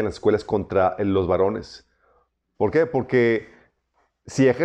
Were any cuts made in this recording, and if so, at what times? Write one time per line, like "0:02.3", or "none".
0:02.5